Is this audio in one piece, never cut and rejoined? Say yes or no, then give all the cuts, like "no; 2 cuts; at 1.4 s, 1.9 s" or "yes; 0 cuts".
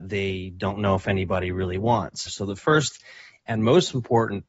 no; 1 cut; at 2.3 s